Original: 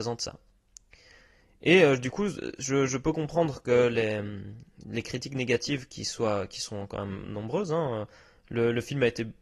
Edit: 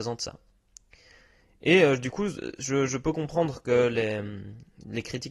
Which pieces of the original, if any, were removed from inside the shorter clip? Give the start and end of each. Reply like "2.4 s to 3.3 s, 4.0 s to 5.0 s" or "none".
none